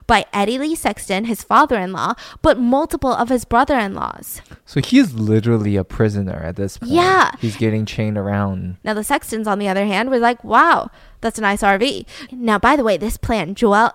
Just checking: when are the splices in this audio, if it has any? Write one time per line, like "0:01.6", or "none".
0:08.8
0:12.3